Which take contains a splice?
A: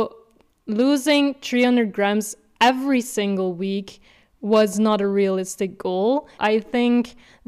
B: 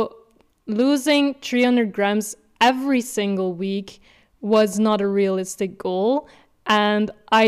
A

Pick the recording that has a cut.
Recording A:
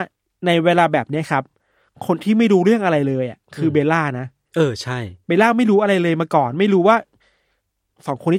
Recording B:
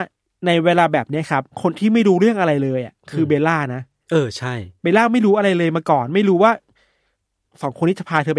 B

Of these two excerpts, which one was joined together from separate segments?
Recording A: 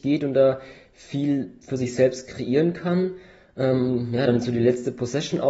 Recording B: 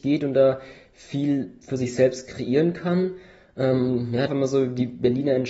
B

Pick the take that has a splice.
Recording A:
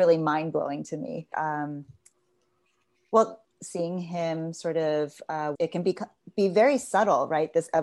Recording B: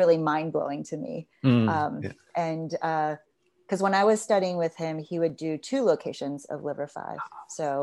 A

